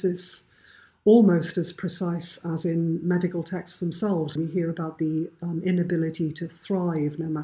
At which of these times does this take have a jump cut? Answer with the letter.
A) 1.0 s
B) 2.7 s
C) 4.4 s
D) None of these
C